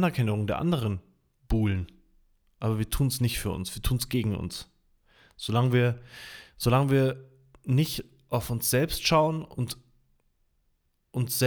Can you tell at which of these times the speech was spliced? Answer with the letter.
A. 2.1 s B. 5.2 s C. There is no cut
C